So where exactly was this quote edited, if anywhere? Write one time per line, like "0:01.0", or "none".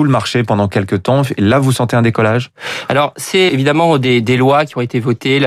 0:03.5